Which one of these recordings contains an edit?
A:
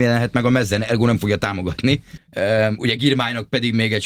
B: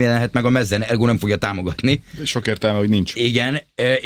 A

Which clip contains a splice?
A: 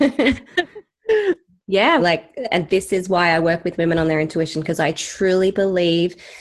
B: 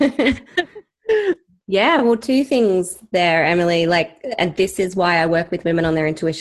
A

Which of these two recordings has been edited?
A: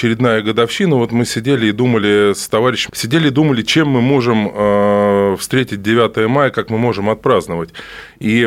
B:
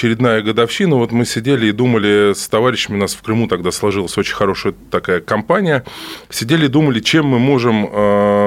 A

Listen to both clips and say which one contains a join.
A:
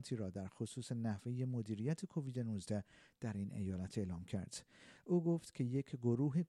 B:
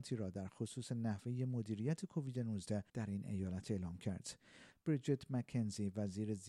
B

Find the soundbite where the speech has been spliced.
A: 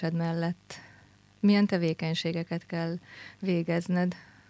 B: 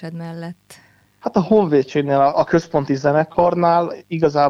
B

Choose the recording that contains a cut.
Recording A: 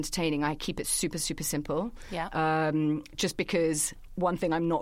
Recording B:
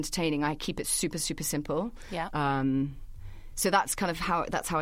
B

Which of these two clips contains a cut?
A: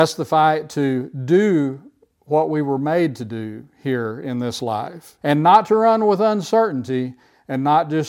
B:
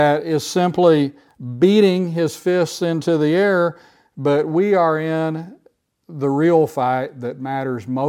A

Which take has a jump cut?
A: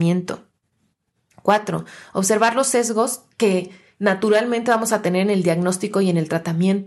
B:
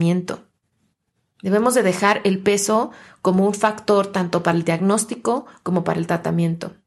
A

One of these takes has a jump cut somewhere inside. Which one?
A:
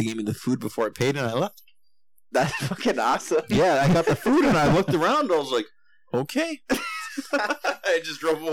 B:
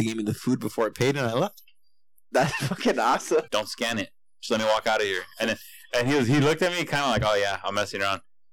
B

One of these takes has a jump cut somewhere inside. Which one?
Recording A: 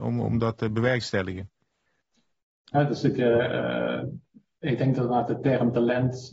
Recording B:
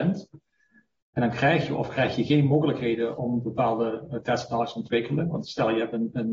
A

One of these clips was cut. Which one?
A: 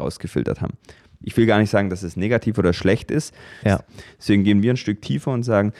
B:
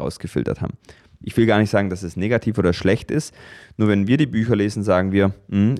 A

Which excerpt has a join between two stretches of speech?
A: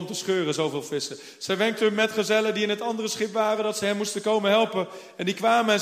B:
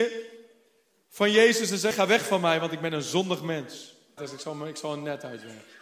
B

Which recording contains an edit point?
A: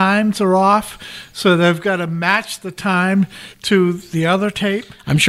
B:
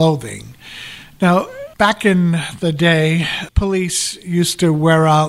B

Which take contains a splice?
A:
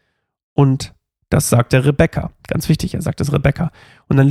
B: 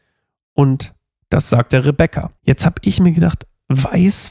B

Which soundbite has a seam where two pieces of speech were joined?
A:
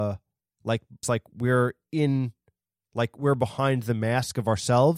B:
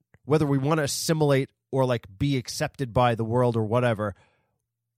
A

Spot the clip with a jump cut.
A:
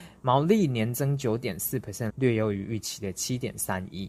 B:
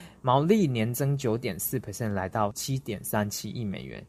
A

